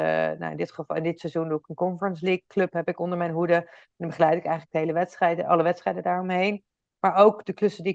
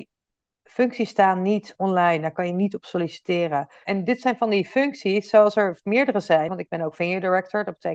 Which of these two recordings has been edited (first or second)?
second